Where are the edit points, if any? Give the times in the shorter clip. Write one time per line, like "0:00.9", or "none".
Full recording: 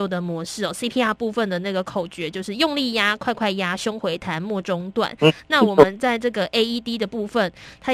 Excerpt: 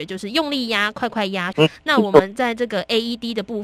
0:01.5